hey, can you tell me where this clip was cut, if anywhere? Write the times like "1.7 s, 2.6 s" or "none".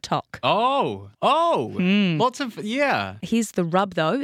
1.1 s, 3.2 s